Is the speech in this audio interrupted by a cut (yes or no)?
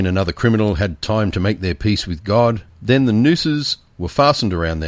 no